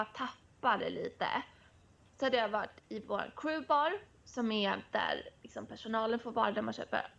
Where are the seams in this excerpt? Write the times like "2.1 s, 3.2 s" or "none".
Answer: none